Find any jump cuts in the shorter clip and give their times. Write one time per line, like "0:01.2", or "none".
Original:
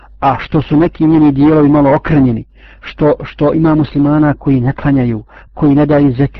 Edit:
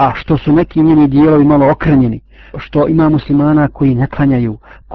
0:02.5